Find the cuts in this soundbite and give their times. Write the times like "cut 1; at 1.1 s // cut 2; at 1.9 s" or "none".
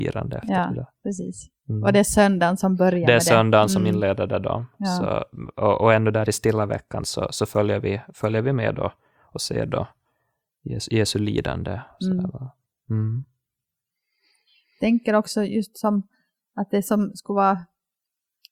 none